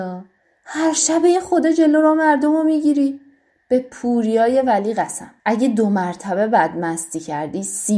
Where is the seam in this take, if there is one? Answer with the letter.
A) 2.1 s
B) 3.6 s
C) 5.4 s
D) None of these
C